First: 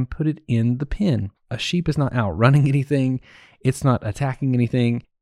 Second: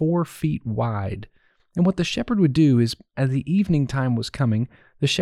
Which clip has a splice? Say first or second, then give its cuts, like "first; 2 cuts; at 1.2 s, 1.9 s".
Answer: first; 1 cut; at 1.4 s